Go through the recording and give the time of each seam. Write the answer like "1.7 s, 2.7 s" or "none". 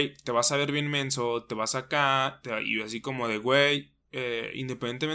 4.0 s

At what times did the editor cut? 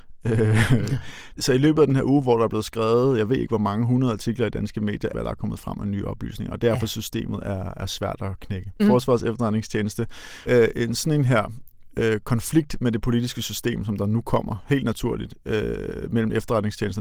5.1 s, 8.8 s, 10.5 s

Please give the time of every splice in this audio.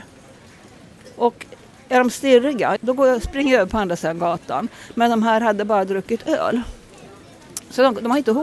2.8 s

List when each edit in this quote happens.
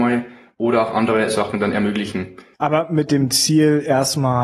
2.5 s

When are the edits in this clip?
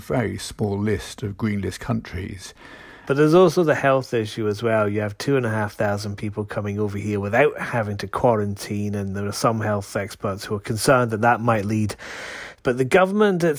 3.1 s, 12.6 s

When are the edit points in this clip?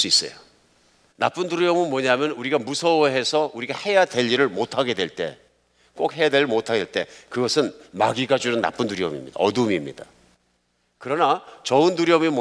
1.1 s

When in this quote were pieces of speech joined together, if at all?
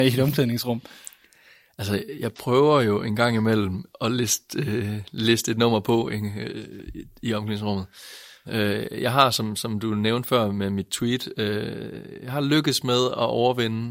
8.4 s

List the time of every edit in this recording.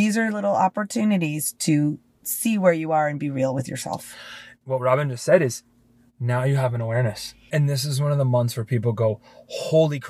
4.6 s, 7.5 s

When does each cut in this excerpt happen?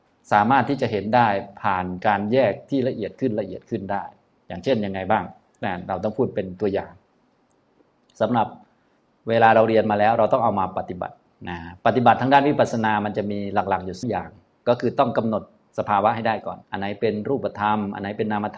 14.0 s, 16.6 s

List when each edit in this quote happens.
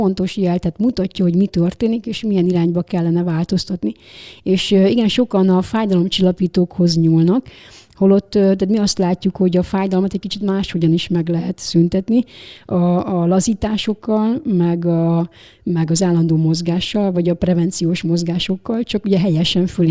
none

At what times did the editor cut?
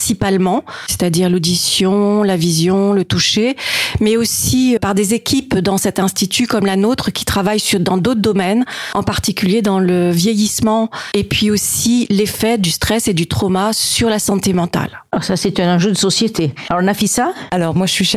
4.8 s

